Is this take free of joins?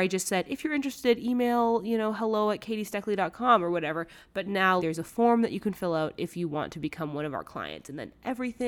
no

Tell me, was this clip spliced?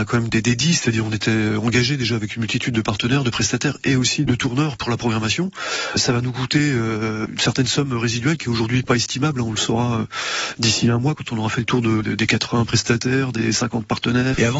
no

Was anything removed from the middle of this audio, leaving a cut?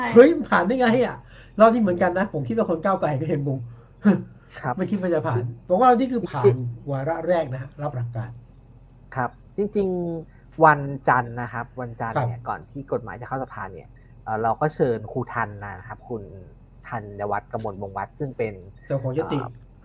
yes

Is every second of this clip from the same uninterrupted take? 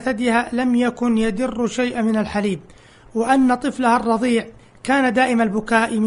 yes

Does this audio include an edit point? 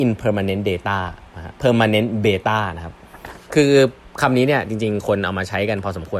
yes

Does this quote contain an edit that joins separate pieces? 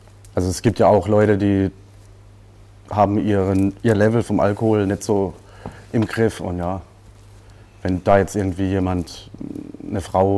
no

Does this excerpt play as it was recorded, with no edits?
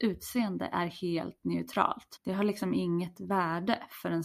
no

